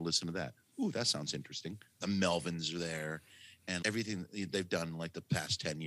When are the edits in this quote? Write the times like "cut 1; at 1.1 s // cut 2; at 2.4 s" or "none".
cut 1; at 2.0 s // cut 2; at 3.8 s